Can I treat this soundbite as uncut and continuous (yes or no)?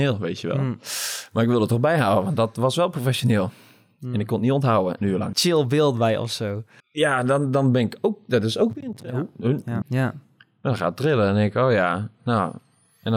no